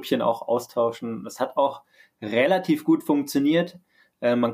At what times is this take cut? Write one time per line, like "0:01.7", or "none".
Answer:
none